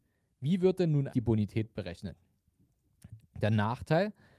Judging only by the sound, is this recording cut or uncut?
cut